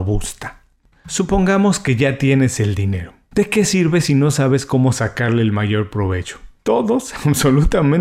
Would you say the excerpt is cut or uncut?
cut